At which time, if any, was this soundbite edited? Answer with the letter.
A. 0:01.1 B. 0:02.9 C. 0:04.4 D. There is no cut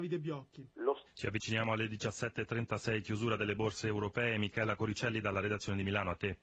A